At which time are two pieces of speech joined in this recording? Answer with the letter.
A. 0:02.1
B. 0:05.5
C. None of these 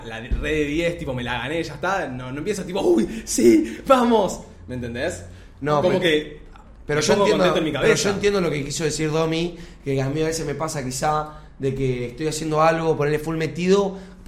C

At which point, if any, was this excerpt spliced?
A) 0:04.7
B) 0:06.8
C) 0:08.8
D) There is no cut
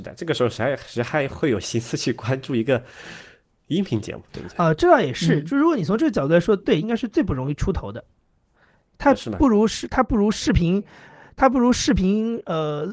B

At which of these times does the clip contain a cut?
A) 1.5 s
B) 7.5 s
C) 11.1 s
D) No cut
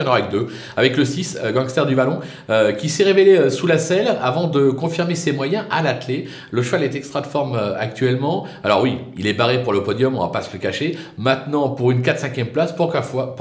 D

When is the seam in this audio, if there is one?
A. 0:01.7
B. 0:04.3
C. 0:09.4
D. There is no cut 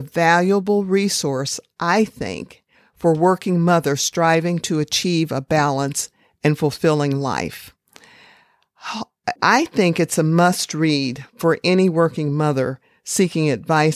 C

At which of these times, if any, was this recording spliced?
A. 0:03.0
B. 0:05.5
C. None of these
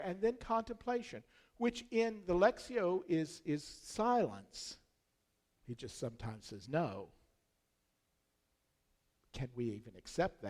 B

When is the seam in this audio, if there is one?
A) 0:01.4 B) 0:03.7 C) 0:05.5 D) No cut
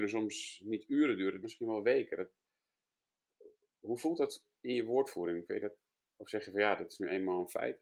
A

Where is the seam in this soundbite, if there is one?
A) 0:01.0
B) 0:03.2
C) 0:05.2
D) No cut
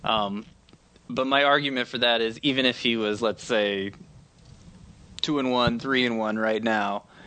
D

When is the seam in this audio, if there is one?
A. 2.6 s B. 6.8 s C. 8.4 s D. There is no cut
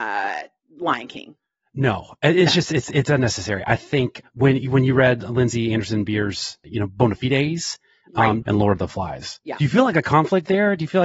C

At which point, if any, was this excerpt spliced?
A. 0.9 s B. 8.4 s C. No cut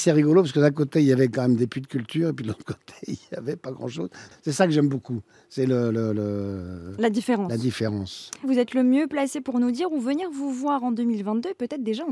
B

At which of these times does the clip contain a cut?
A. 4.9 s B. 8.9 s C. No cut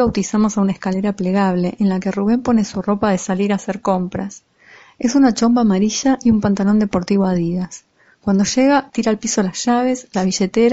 B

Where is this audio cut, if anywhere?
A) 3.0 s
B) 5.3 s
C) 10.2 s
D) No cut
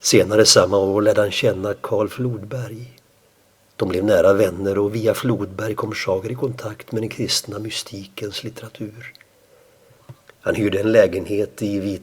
D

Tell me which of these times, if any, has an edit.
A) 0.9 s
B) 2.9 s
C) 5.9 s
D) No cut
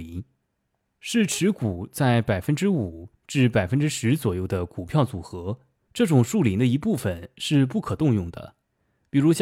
C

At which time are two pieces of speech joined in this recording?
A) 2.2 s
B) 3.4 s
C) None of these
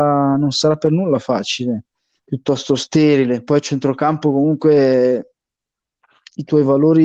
A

